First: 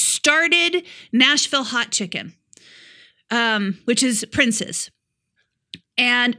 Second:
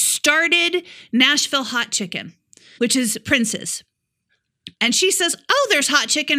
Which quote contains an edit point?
second; 2 cuts; at 2.8 s, 4.8 s

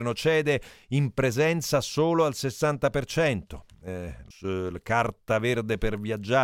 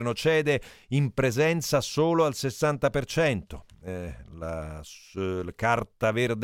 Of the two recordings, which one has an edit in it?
first; 1 cut; at 4.3 s

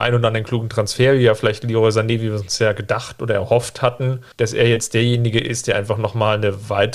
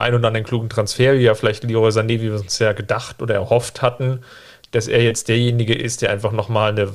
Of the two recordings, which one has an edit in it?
first; 1 cut; at 4.3 s

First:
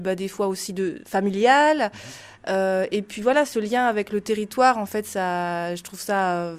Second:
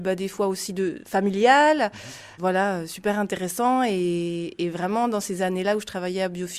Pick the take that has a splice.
second; 1 cut; at 2.4 s

